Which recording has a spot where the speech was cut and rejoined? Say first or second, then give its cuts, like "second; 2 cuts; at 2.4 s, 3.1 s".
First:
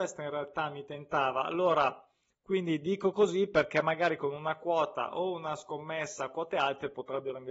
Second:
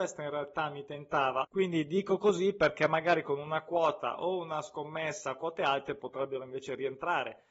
second; 1 cut; at 1.4 s